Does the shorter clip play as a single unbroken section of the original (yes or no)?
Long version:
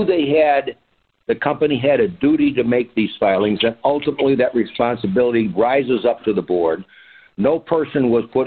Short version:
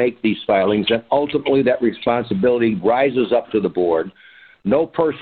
yes